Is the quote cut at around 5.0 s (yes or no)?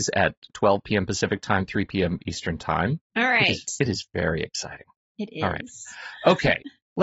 no